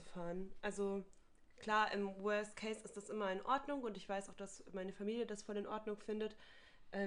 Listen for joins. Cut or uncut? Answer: uncut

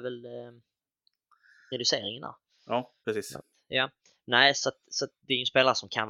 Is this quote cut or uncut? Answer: uncut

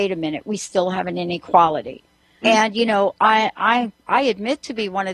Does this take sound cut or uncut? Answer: cut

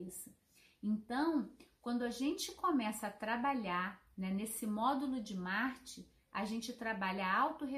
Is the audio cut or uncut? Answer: uncut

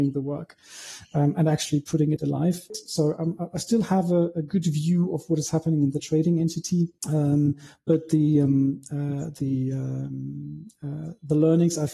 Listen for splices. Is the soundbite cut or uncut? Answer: cut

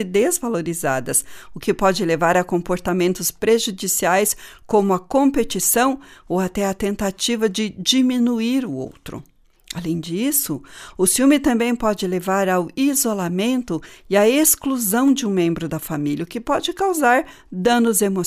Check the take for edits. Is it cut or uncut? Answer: uncut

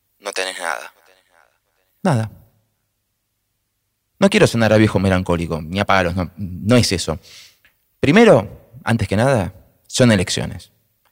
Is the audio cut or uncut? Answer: uncut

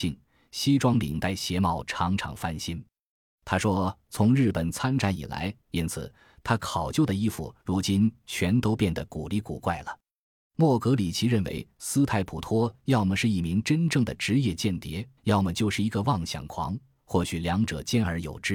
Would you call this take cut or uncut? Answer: cut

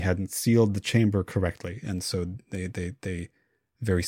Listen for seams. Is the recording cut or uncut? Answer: uncut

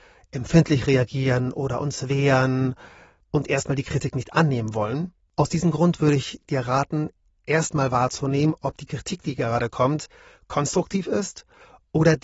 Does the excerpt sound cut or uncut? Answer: uncut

